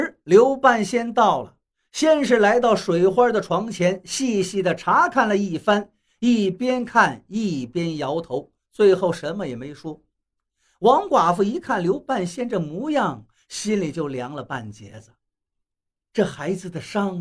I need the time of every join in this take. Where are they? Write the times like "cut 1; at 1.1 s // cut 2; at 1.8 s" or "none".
none